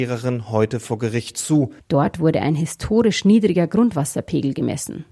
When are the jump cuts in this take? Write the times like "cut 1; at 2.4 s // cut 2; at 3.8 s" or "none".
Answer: cut 1; at 1.8 s